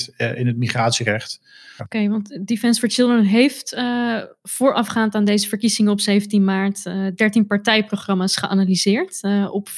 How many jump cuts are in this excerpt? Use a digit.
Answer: 1